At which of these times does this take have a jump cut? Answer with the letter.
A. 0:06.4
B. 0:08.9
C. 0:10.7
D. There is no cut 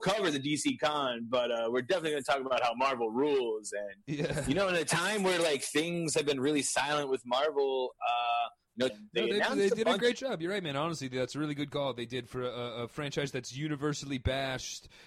B